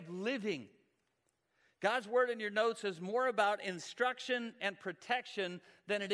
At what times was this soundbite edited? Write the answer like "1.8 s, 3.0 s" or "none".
none

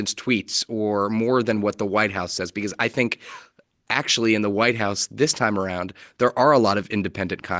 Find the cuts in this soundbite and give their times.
none

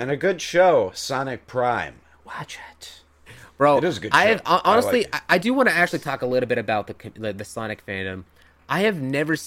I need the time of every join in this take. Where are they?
none

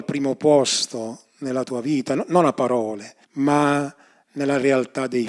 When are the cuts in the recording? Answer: 3.2 s

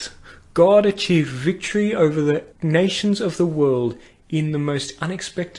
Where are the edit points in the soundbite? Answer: 2.5 s

